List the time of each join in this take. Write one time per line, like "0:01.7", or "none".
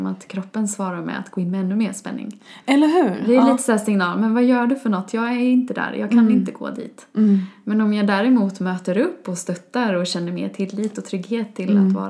none